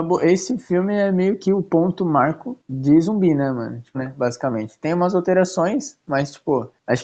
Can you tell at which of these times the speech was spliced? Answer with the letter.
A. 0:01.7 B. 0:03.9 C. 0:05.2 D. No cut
B